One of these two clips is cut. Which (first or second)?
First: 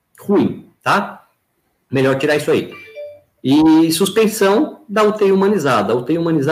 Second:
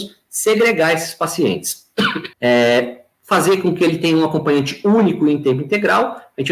second